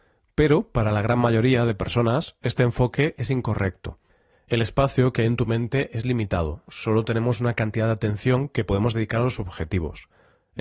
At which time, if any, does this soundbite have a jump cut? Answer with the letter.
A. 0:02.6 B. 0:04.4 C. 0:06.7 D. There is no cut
C